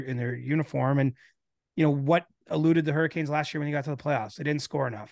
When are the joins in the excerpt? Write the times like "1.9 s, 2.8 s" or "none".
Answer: none